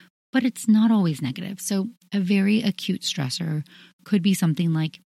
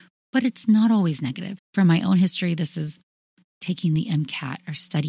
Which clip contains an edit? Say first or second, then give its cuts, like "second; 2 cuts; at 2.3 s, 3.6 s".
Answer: second; 1 cut; at 1.6 s